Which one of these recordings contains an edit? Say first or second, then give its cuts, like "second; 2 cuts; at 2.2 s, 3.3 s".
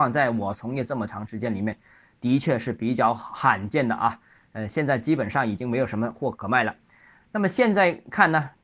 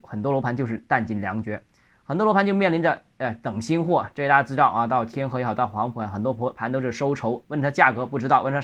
first; 1 cut; at 6.3 s